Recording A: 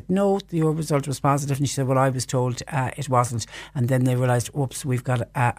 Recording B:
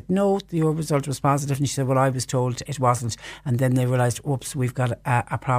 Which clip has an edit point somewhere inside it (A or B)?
B